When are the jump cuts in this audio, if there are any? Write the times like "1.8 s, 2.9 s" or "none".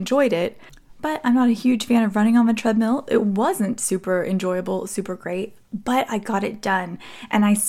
none